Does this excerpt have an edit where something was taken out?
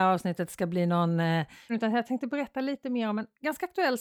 yes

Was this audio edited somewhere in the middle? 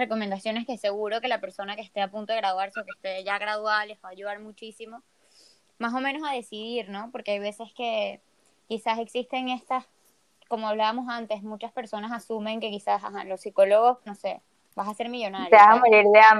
yes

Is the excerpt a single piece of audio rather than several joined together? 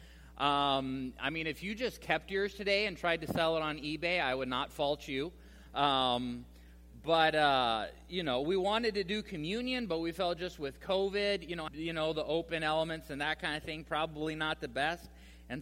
no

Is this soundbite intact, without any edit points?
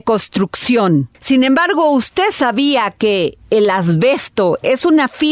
yes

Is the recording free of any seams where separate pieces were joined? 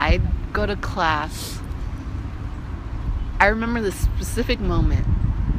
yes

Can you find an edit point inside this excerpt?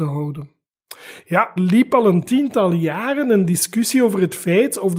yes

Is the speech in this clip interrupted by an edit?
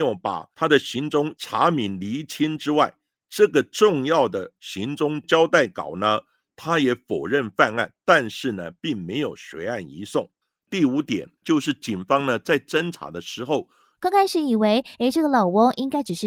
yes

